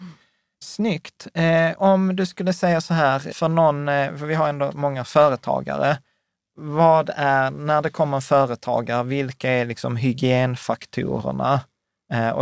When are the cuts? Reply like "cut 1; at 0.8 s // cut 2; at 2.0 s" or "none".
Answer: cut 1; at 3.3 s